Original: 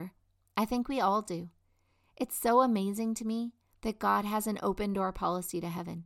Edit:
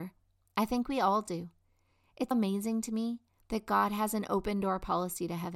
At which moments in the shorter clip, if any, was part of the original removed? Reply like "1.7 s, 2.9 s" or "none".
2.3 s